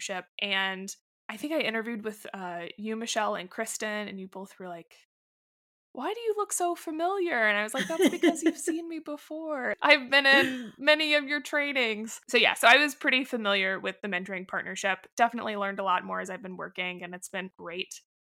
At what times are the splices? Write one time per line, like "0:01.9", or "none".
none